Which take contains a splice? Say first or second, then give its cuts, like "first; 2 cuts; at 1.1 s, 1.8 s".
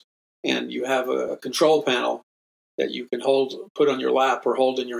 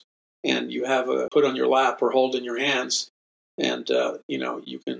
second; 1 cut; at 1.3 s